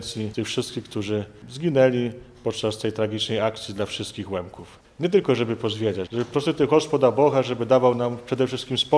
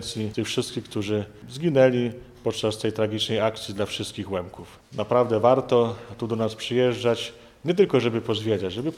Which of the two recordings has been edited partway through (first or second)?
first